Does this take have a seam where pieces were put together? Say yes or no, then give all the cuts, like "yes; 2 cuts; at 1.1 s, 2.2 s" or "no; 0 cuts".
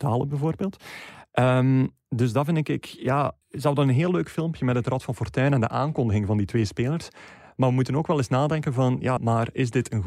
yes; 2 cuts; at 3.4 s, 9.2 s